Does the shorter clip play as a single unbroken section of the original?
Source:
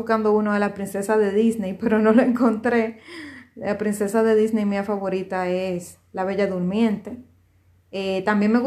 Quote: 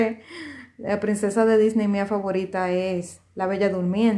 yes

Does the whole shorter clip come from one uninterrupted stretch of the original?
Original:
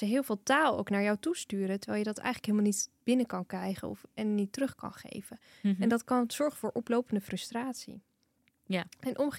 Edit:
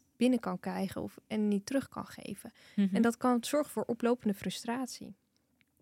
yes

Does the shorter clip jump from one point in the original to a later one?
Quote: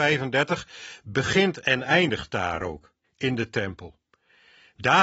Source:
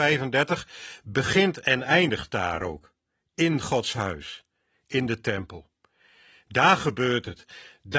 yes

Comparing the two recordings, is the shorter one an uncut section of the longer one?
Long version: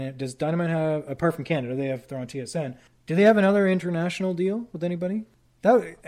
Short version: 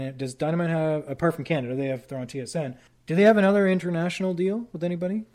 yes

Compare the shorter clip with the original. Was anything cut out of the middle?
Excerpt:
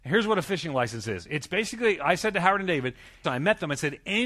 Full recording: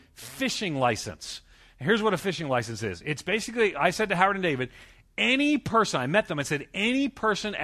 yes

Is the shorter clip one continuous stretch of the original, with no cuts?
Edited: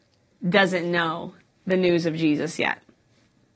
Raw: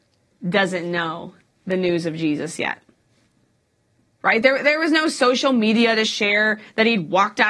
yes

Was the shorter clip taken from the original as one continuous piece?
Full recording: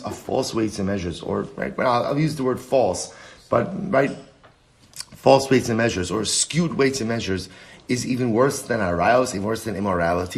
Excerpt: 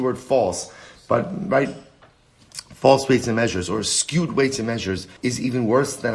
no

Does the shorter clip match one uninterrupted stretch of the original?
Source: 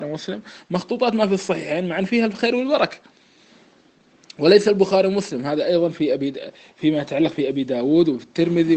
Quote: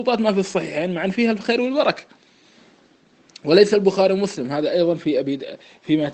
yes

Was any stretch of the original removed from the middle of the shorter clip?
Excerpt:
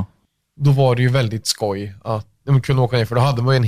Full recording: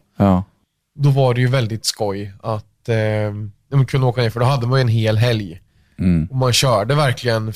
yes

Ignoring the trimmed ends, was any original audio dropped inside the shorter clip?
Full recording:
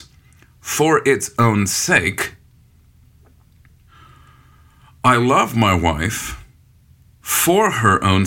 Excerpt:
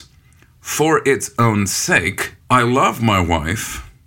yes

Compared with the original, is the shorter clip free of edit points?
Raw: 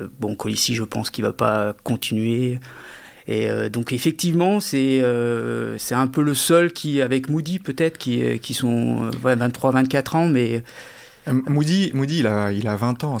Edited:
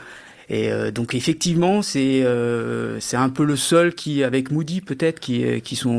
yes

